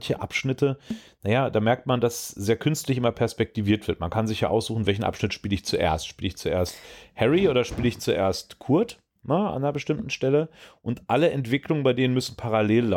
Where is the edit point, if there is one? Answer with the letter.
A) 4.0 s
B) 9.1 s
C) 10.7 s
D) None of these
D